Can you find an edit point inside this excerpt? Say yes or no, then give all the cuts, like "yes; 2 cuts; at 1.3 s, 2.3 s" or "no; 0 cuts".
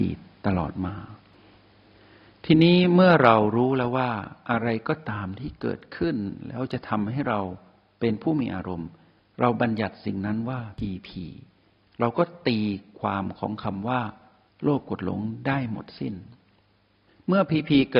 no; 0 cuts